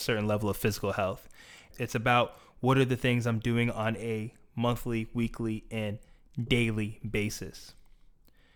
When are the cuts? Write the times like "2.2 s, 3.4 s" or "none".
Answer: 1.7 s

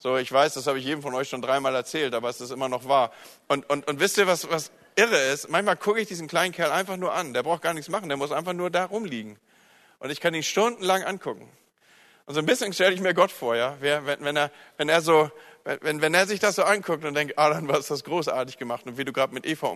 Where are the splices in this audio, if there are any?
none

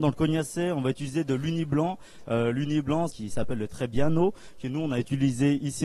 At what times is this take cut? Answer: 3.1 s

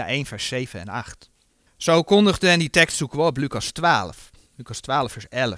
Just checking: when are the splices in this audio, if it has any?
none

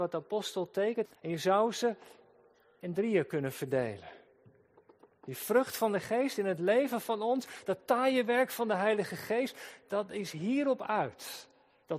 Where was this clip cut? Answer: 1.1 s

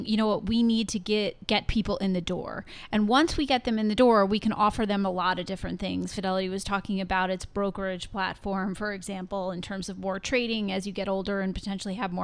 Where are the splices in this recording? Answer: none

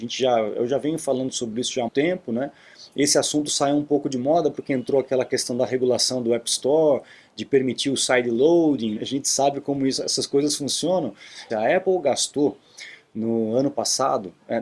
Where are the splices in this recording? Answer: 1.9 s, 9.0 s, 11.5 s

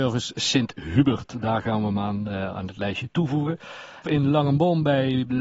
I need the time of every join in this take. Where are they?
4.0 s

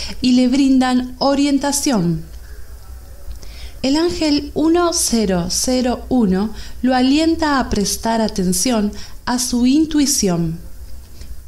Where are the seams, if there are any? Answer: 3.8 s

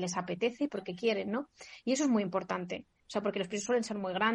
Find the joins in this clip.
3.0 s

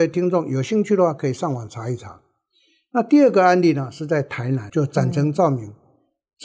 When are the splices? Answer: 4.7 s

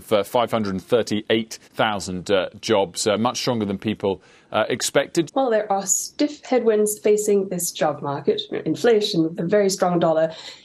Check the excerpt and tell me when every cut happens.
1.6 s, 5.3 s, 9.3 s

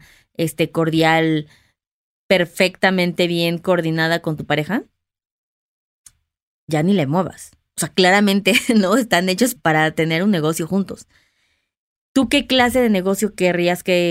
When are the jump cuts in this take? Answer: 9.6 s, 11.9 s

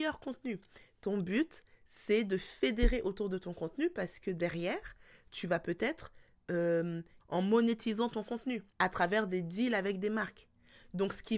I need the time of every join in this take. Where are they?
7.2 s, 8.7 s

